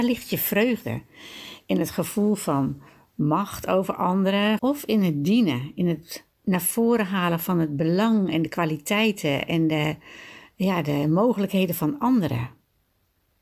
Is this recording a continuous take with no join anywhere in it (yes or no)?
no